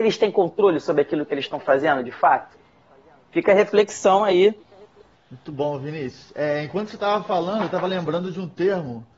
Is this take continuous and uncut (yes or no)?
no